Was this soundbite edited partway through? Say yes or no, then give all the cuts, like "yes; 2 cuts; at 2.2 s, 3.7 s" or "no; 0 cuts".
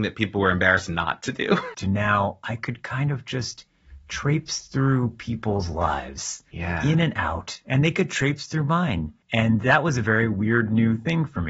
yes; 1 cut; at 1.7 s